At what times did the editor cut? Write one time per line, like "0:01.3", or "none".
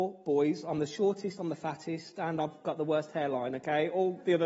none